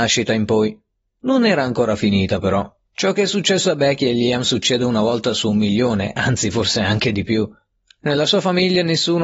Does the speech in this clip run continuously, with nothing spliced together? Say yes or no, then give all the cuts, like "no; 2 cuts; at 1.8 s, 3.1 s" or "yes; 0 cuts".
yes; 0 cuts